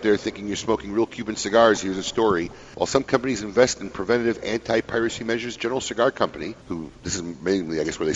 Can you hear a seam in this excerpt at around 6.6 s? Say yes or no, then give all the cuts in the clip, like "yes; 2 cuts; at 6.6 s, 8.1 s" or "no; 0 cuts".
yes; 2 cuts; at 2.7 s, 6.6 s